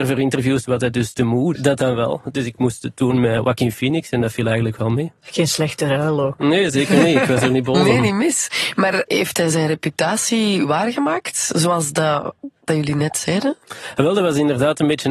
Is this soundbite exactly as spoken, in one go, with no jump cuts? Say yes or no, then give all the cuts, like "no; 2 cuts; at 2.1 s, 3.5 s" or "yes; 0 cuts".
no; 1 cut; at 1.5 s